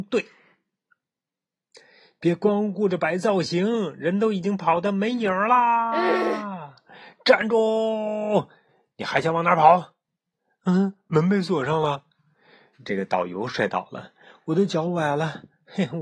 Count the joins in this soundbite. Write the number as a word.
one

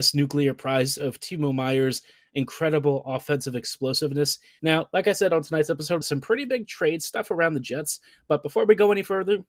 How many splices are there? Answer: two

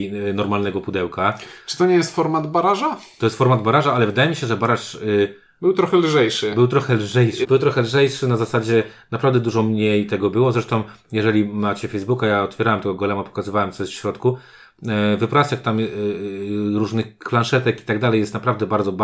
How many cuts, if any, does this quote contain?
one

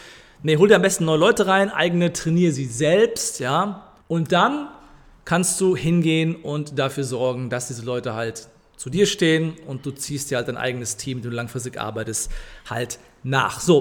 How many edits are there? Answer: one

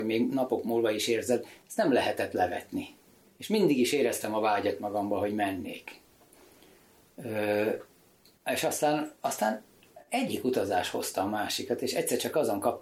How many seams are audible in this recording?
zero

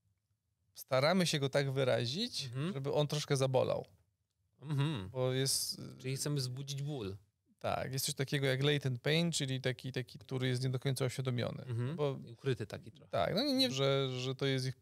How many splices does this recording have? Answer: two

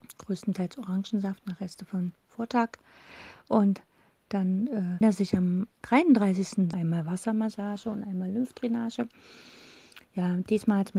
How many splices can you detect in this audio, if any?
two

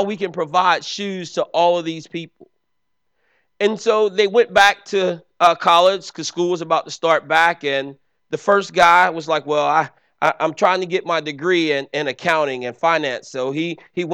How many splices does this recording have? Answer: zero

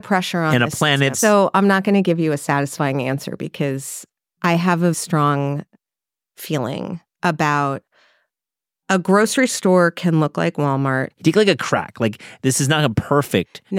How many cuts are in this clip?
three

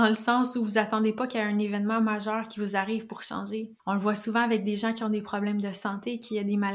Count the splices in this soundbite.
one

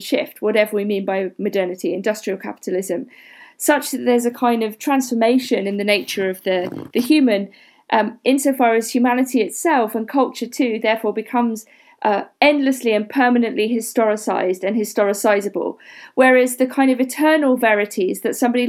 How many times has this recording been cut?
one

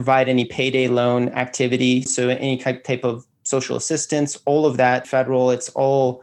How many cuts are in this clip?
two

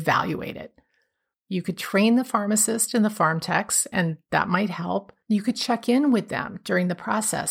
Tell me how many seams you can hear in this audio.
one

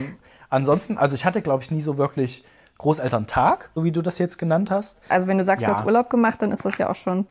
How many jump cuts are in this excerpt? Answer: two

